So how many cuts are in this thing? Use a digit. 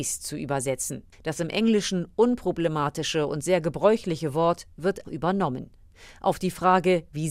2